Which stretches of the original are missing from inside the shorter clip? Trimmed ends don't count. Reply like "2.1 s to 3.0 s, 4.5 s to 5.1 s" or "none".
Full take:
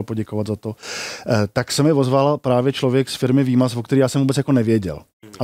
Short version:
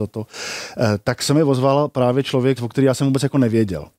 3.1 s to 3.7 s